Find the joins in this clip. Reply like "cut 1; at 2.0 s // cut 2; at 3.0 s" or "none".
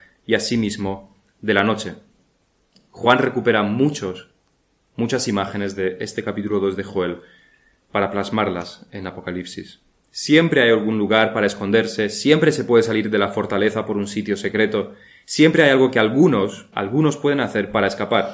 cut 1; at 10.0 s // cut 2; at 16.7 s